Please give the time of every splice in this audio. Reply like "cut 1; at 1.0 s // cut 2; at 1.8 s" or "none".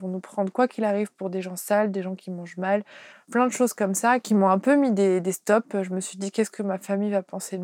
cut 1; at 3.1 s